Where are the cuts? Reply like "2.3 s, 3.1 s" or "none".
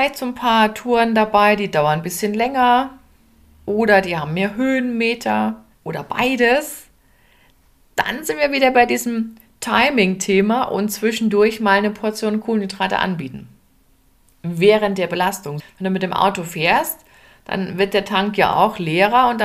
5.7 s, 15.6 s